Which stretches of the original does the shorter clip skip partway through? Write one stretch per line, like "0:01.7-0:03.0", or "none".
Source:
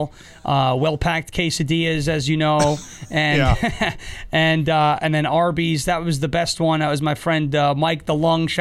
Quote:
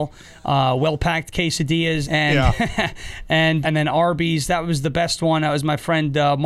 0:02.0-0:03.1
0:04.6-0:05.0